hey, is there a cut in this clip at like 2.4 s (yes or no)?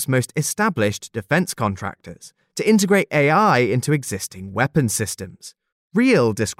yes